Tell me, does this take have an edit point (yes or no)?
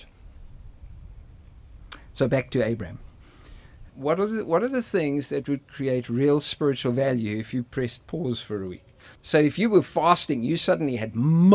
yes